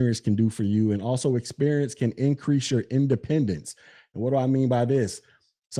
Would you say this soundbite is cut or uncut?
uncut